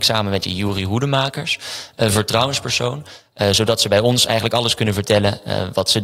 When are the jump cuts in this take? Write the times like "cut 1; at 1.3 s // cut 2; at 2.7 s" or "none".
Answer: none